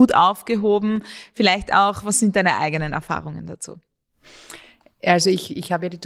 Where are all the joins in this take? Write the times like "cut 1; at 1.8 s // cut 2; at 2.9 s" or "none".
none